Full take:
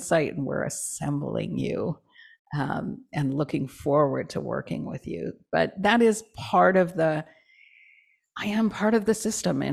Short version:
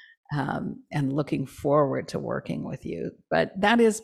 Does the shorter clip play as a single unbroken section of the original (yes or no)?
yes